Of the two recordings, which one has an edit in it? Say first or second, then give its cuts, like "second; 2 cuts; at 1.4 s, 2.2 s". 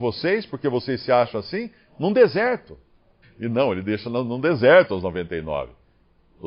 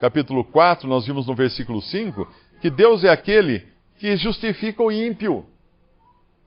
first; 1 cut; at 3.2 s